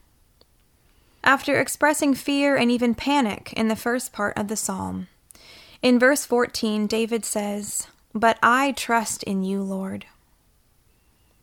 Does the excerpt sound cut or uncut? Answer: cut